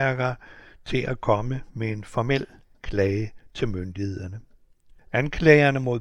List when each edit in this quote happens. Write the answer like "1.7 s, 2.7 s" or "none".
5.0 s